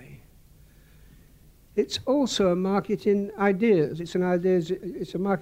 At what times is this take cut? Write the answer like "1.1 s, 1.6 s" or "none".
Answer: 1.7 s, 4.0 s